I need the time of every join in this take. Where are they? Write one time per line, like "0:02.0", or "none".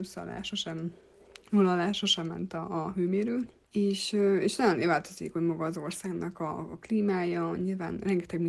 none

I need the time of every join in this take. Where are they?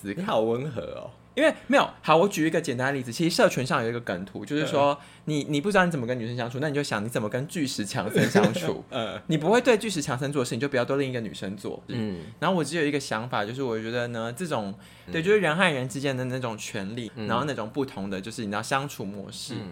0:11.9
0:15.1
0:17.1

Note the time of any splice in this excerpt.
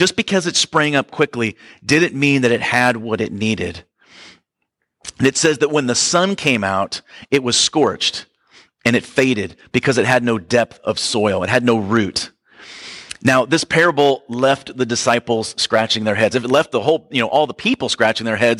none

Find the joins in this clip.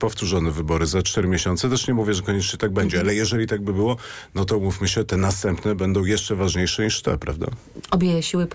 none

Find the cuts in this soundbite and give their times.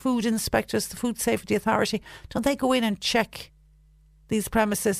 none

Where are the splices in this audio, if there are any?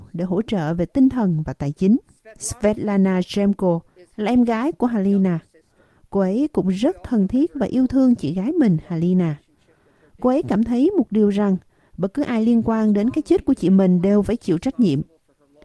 none

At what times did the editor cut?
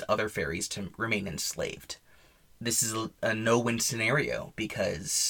none

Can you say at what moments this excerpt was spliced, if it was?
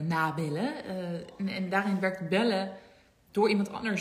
none

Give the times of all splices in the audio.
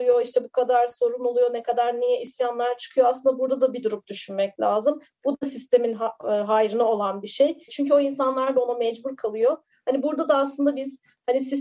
0:07.7

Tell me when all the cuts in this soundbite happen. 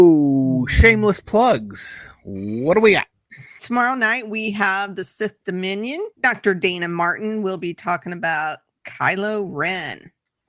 0:03.6
0:06.1

